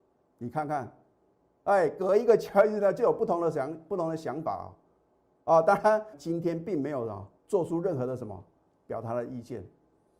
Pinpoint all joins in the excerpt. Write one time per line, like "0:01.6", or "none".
0:06.1
0:07.4

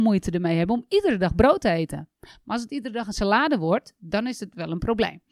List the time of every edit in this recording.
0:02.1

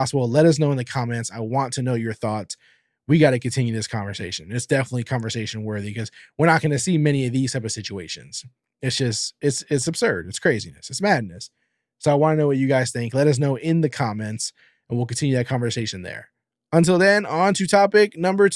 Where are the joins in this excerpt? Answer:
none

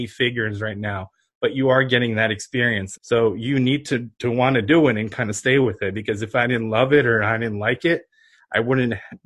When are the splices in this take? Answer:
0:03.0

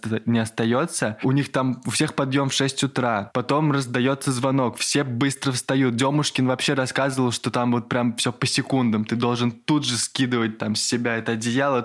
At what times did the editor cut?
none

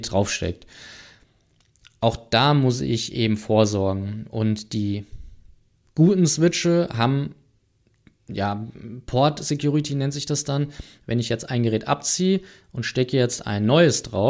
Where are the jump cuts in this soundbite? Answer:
0:11.0

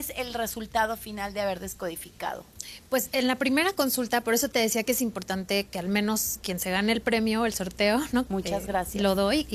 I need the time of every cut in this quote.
0:08.3

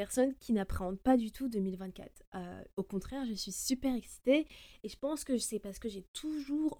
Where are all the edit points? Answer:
none

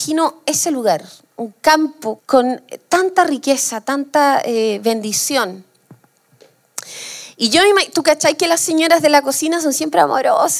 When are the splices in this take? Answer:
0:02.2

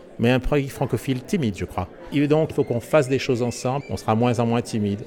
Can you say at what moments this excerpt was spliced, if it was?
0:02.5
0:03.8

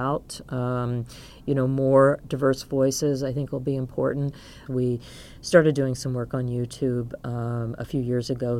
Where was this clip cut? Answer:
0:04.7

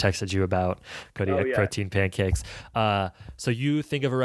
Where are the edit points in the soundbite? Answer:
none

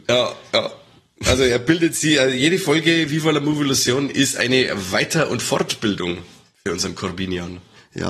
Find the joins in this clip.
none

